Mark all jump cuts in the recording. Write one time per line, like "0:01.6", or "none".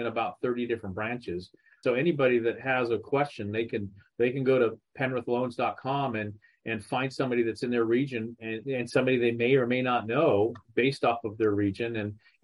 0:01.8
0:08.6